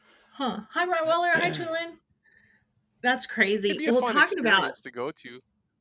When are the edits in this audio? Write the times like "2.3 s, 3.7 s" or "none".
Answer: none